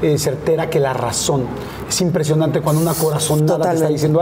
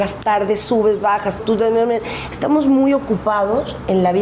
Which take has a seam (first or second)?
second